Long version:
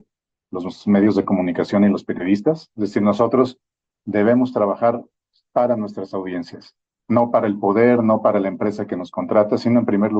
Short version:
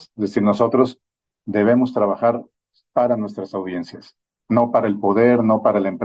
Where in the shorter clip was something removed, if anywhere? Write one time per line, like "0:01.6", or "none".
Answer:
none